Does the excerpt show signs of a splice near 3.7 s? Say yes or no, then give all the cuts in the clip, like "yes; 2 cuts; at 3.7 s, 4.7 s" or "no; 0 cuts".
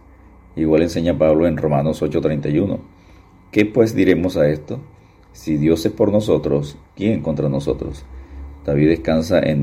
no; 0 cuts